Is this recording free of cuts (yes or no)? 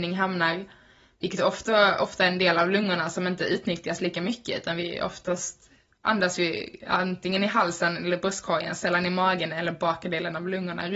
yes